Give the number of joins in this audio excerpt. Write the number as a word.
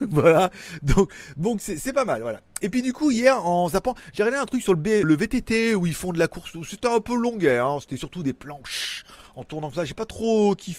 one